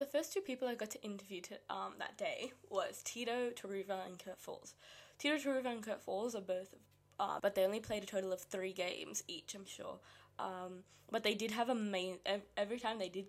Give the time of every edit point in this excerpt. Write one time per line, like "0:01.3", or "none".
0:07.4
0:09.7